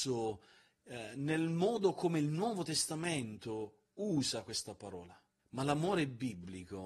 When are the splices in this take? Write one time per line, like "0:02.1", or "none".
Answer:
0:05.4

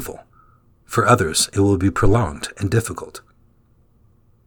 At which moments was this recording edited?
none

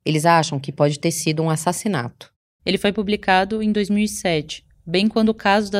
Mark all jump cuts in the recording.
0:02.6

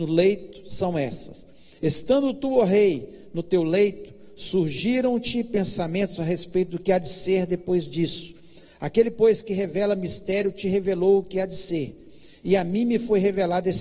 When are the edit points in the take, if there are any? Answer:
none

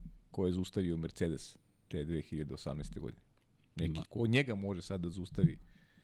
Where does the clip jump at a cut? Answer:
0:04.1

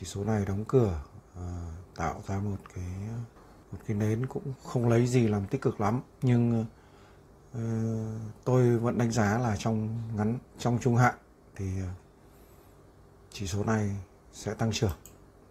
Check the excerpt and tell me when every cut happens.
0:04.6
0:06.1
0:10.5

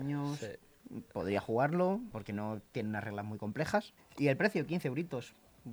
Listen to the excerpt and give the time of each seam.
0:02.1
0:04.0

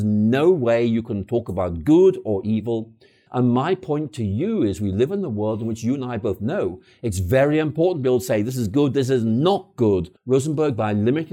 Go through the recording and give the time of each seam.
0:03.3
0:10.2

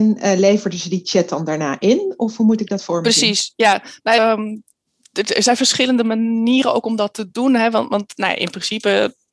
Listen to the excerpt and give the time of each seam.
none

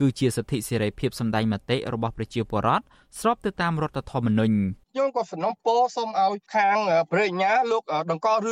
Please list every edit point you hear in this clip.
0:04.8

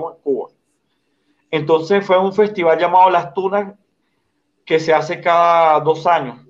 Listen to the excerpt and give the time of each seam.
none

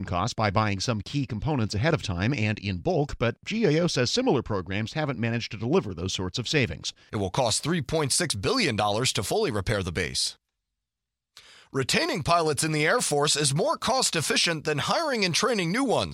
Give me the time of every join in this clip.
0:07.1

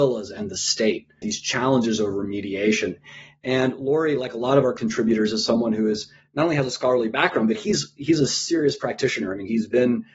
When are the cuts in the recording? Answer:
0:01.2

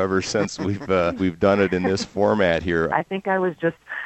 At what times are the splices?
0:01.2
0:02.9

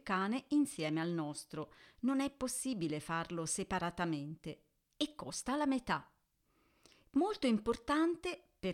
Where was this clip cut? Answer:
none

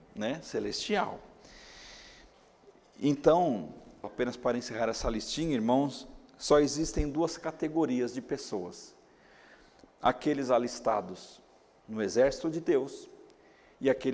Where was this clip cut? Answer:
0:04.0

